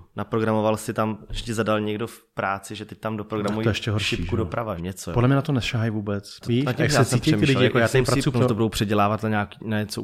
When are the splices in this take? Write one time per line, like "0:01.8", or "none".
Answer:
0:04.8
0:06.4
0:08.3